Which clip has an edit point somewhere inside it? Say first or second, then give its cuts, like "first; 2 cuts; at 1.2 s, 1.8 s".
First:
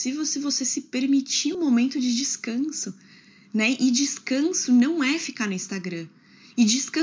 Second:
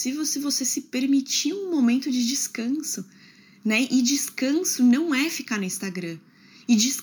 first; 1 cut; at 1.5 s